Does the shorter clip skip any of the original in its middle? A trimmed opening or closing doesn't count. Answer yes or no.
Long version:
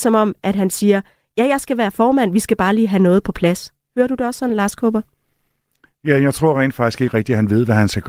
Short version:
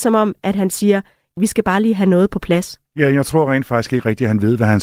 yes